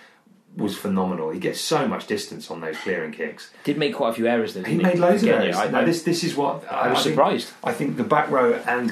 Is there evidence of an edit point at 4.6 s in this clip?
no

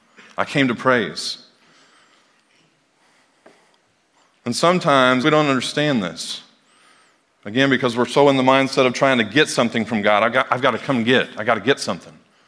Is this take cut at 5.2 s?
yes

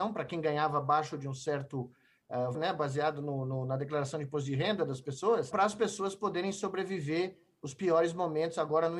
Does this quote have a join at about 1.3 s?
no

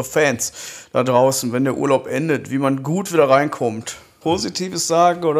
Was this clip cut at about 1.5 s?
no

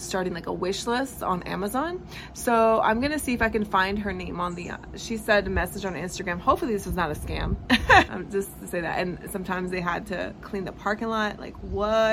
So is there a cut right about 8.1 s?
yes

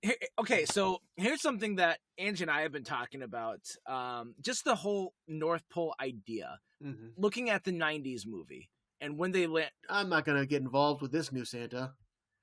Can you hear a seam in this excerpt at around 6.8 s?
yes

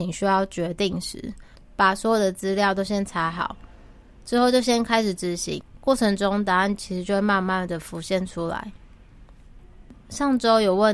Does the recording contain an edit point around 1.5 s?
yes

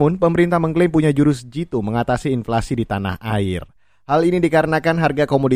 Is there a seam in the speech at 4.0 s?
yes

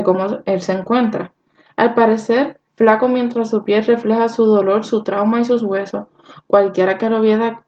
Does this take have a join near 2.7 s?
yes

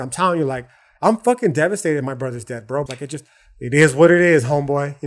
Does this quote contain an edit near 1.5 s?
no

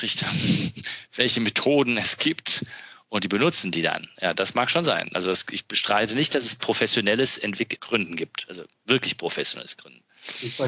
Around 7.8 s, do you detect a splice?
yes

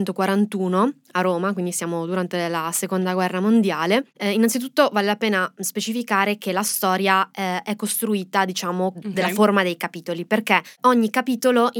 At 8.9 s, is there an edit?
yes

